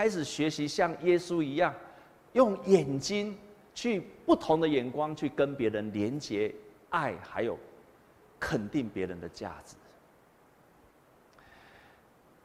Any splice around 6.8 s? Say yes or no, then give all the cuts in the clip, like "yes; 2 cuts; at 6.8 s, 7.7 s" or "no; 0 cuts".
no; 0 cuts